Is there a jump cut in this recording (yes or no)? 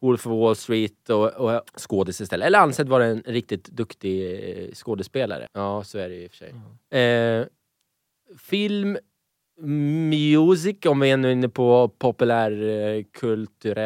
yes